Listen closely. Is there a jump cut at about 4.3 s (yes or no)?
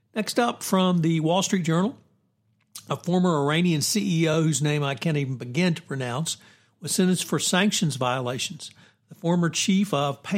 no